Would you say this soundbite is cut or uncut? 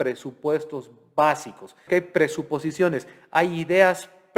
cut